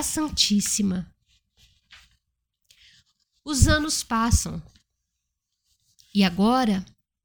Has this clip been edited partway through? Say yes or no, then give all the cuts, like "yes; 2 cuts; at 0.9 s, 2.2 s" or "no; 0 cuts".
no; 0 cuts